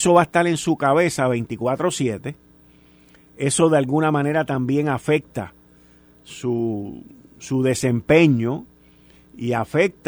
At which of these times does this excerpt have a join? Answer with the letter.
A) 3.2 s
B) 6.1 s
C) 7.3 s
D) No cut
D